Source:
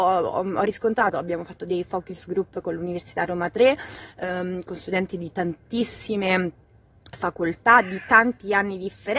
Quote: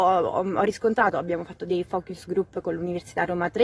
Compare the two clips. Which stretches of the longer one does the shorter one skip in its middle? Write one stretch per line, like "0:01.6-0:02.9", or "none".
none